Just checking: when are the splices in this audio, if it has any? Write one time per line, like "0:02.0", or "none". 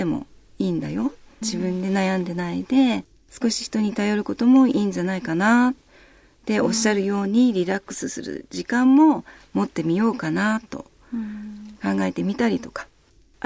0:01.4